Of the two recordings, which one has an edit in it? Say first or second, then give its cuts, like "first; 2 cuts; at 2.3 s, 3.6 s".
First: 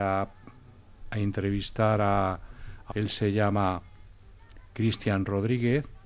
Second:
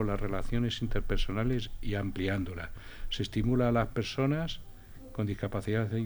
first; 1 cut; at 2.9 s